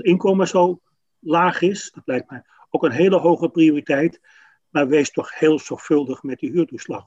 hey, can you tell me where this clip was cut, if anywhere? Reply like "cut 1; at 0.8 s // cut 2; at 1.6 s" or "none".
cut 1; at 1.9 s